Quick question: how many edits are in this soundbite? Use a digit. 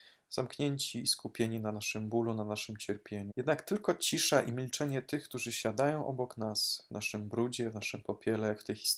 1